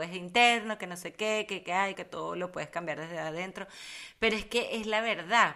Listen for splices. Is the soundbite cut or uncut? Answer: cut